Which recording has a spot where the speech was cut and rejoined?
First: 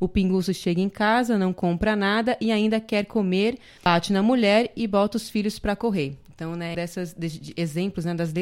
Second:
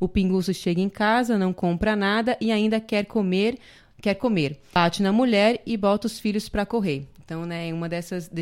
first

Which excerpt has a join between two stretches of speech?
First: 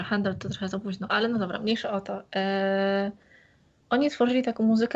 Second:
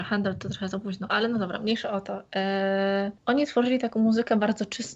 second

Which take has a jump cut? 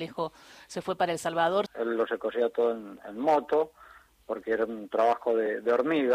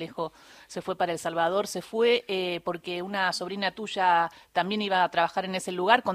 first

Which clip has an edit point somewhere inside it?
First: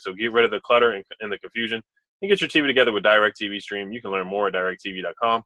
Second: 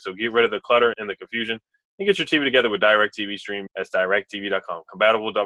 second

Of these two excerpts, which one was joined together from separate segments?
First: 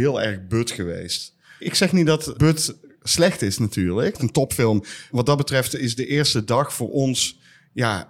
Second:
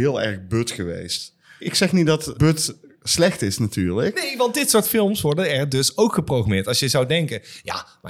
first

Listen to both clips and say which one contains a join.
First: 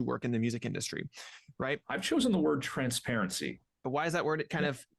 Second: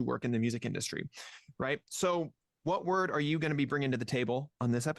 first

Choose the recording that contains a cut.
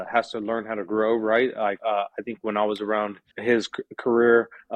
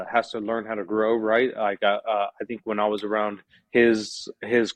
first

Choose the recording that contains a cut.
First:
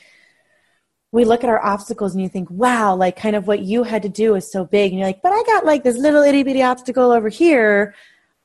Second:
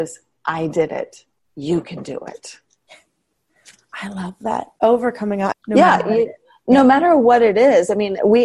second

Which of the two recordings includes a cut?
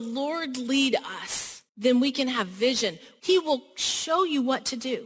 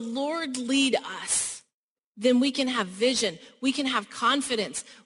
first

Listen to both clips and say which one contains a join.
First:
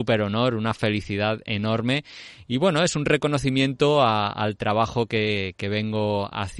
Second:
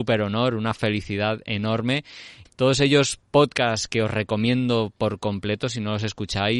second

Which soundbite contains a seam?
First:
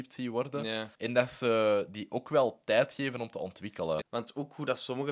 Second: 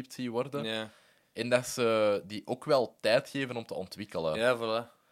first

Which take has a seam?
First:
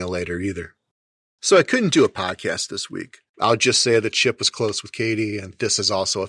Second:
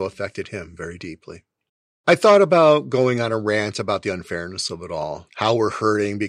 second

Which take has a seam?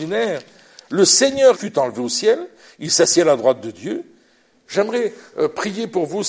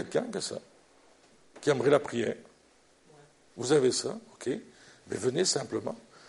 first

